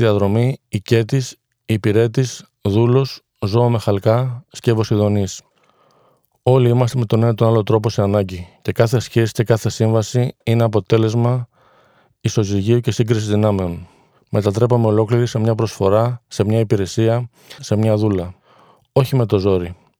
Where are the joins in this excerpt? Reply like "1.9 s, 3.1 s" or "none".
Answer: 14.2 s, 17.6 s